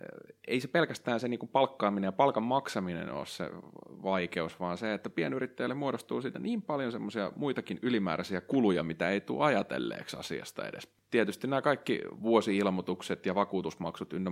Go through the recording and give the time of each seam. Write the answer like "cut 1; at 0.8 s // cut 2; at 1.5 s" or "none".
none